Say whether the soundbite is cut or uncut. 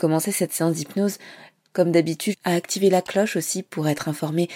cut